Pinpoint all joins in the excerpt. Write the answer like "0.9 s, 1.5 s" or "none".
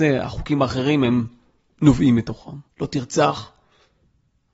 2.7 s